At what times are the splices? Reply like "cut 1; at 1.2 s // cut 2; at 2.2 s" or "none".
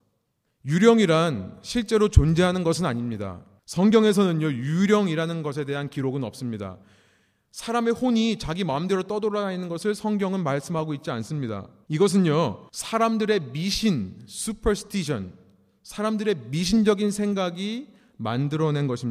cut 1; at 11.8 s